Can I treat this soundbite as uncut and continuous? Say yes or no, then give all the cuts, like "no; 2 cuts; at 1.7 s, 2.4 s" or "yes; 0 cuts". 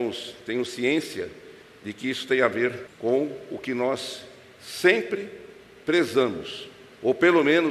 no; 1 cut; at 2.9 s